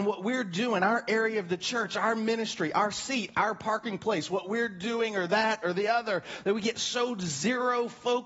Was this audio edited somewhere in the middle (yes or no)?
no